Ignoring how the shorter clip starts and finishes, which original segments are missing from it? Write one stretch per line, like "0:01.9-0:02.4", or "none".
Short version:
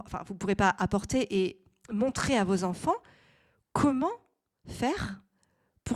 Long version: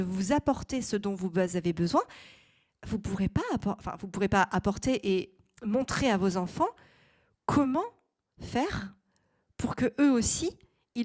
none